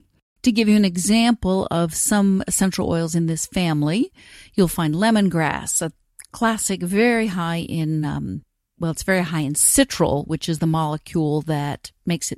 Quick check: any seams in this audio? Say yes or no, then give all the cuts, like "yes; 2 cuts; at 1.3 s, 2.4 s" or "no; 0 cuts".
no; 0 cuts